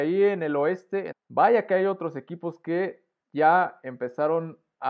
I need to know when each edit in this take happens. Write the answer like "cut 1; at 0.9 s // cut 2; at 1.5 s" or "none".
cut 1; at 1.1 s

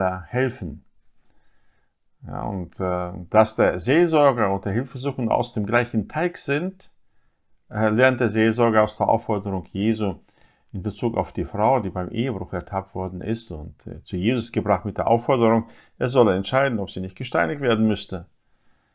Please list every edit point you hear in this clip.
none

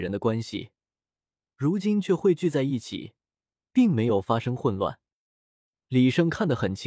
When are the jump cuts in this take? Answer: none

